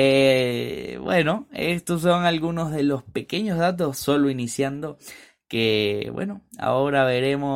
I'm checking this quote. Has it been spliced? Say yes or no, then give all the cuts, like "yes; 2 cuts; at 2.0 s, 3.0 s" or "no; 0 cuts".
no; 0 cuts